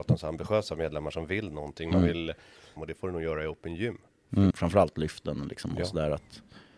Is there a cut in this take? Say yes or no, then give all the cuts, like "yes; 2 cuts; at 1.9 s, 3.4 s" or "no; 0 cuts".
yes; 2 cuts; at 2.8 s, 4.5 s